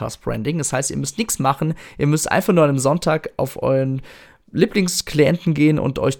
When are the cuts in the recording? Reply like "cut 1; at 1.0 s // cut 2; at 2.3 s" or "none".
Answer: none